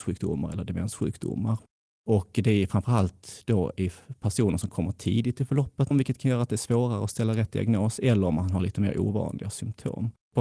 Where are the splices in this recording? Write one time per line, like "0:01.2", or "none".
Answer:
0:05.9